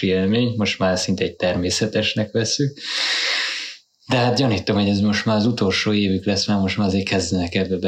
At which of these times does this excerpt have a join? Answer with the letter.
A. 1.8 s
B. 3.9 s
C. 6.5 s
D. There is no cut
D